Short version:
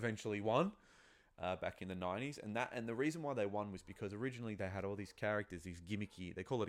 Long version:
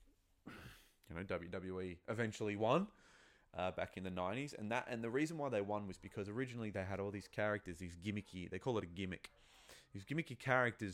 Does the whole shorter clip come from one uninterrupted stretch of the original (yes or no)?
yes